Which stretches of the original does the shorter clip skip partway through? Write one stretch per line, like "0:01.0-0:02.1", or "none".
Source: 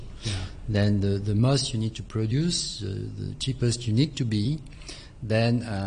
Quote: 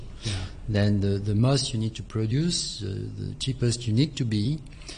none